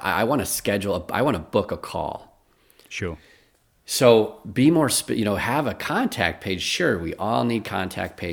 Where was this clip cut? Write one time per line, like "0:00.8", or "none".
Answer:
none